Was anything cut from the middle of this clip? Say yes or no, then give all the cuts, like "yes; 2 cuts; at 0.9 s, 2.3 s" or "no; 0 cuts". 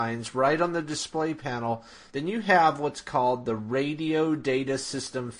no; 0 cuts